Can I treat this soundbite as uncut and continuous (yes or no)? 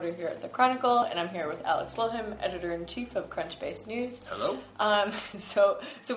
yes